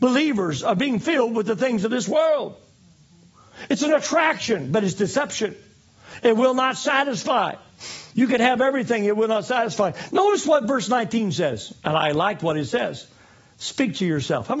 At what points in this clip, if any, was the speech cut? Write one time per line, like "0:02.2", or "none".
0:10.1